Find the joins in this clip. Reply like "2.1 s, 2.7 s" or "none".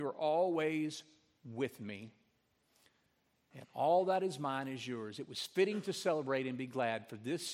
none